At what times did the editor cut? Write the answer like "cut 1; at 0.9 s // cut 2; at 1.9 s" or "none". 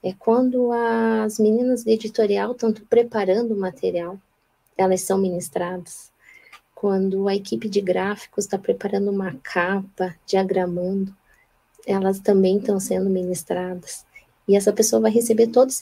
none